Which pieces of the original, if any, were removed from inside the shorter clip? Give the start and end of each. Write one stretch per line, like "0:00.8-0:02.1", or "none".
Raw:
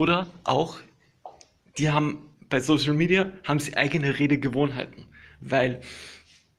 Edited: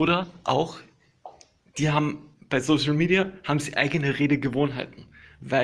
none